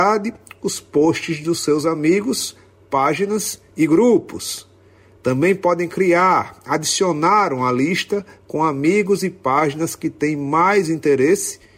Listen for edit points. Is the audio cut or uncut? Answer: uncut